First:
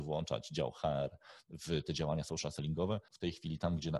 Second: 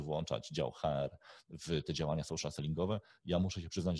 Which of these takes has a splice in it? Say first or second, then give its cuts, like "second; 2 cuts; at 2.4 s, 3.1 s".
first; 1 cut; at 3.1 s